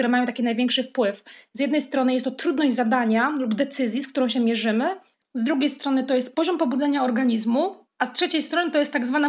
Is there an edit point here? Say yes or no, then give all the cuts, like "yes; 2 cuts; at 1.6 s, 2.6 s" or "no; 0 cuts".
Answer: no; 0 cuts